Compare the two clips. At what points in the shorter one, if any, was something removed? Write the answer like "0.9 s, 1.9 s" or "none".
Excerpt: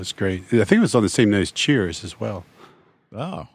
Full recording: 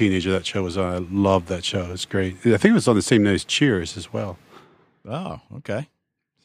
none